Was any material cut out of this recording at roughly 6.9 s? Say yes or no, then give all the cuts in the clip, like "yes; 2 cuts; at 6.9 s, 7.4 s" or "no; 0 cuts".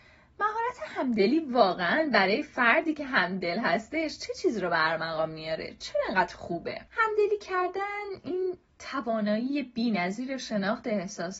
yes; 1 cut; at 6.9 s